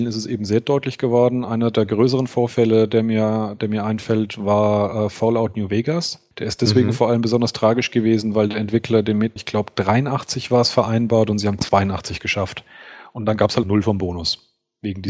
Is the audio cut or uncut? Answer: cut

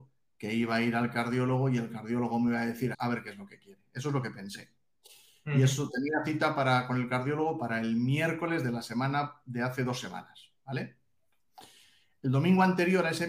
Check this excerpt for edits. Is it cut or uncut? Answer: cut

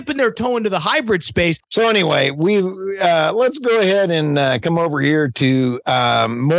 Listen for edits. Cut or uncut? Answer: cut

